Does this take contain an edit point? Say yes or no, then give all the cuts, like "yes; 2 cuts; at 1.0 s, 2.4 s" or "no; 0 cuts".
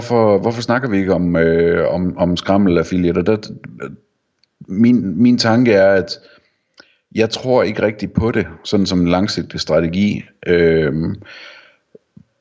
no; 0 cuts